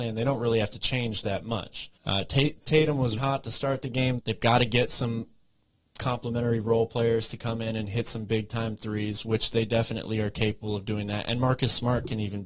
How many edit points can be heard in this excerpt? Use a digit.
3